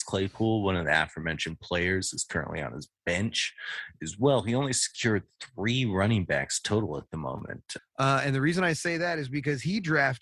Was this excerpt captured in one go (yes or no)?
no